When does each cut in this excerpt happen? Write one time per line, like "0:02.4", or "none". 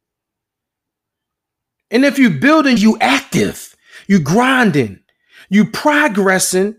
0:02.8

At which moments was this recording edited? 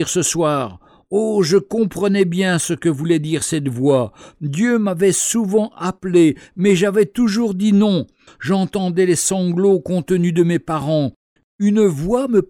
0:08.3
0:11.4

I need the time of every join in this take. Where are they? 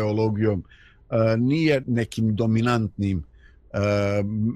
0:01.8

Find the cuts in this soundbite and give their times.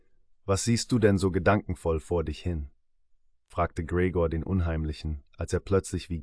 none

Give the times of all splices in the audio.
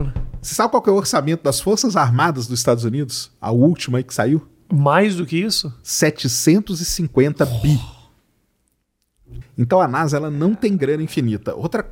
0:09.4

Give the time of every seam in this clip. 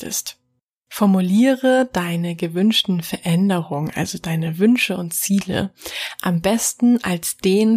none

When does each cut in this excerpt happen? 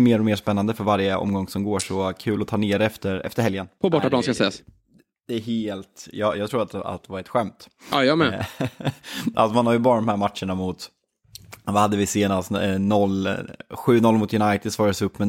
0:03.8

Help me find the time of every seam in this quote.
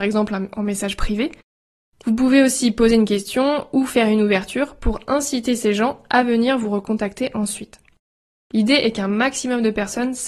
0:08.3

